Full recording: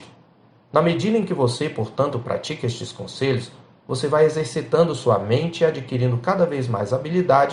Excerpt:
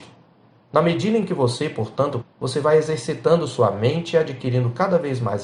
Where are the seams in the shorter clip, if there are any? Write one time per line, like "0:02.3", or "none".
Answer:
0:02.2